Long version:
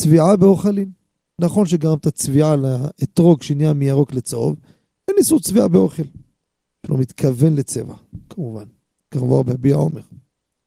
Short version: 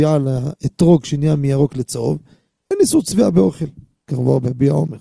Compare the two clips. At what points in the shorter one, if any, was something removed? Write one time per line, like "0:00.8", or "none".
0:04.0